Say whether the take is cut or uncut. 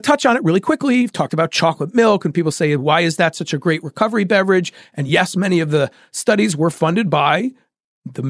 uncut